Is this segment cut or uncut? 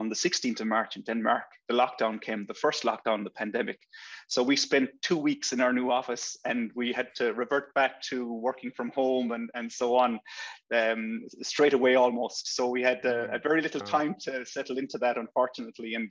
uncut